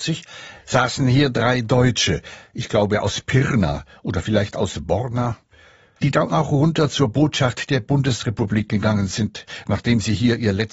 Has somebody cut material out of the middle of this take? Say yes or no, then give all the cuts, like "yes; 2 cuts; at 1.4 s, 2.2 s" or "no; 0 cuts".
no; 0 cuts